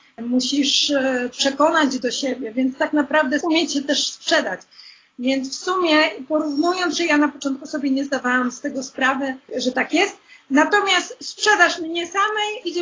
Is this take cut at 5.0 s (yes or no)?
no